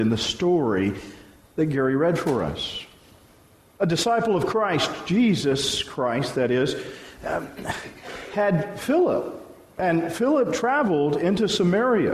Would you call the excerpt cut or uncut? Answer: uncut